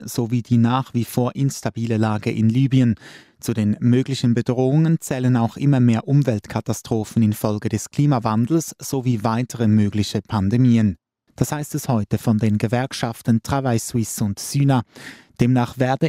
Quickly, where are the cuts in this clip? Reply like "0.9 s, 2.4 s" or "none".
11.3 s